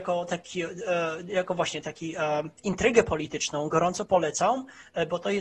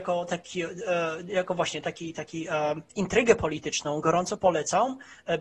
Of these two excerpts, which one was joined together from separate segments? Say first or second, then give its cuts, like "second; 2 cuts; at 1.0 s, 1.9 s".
first; 1 cut; at 1.8 s